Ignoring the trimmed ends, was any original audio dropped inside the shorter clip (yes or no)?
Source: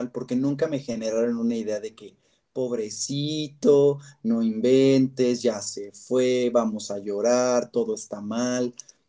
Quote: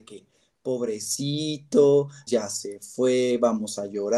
yes